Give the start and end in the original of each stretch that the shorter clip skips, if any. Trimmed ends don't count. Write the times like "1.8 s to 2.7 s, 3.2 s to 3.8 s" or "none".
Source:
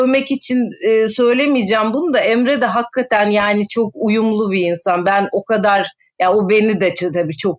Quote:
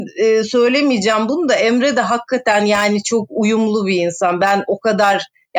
none